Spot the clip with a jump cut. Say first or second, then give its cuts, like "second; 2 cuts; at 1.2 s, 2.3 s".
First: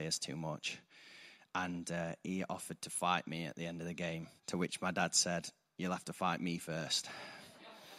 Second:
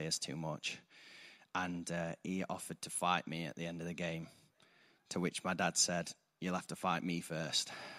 first; 1 cut; at 4.4 s